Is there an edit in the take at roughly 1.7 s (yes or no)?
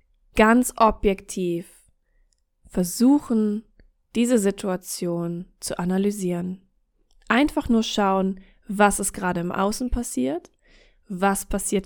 no